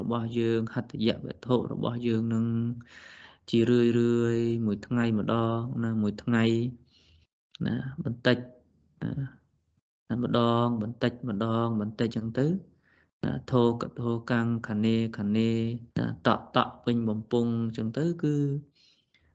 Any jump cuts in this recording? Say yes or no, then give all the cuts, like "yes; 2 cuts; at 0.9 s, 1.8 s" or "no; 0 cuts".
yes; 2 cuts; at 12.1 s, 15.9 s